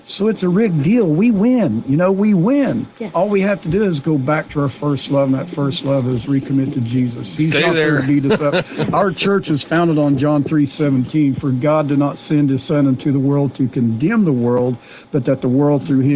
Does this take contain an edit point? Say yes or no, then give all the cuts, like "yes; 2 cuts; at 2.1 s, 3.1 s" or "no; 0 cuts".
no; 0 cuts